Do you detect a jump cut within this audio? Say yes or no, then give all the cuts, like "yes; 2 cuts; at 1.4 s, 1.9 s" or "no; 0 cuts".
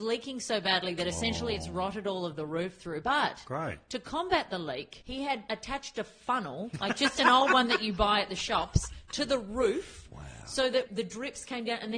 no; 0 cuts